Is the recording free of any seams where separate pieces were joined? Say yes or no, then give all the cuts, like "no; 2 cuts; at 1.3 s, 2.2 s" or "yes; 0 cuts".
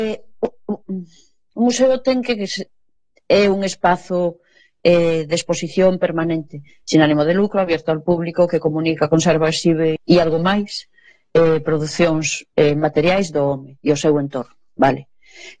no; 1 cut; at 10.0 s